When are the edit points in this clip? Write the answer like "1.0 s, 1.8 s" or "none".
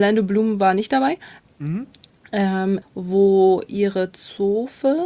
1.4 s, 2.8 s